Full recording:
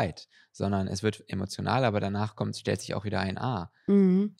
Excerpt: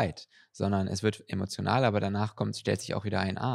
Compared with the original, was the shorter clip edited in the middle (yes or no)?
no